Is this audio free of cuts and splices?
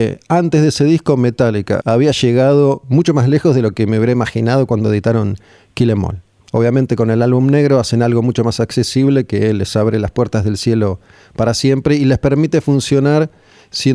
no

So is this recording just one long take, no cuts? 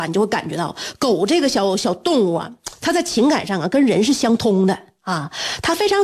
yes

